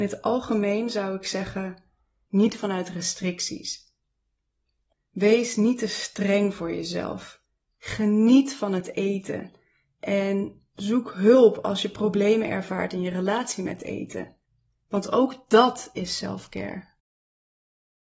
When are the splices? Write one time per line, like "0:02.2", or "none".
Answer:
0:02.3